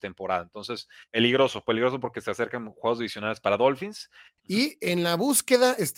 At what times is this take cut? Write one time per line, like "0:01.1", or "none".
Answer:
0:01.1
0:04.4